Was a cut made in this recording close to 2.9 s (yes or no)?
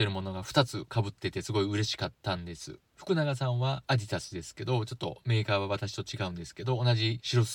yes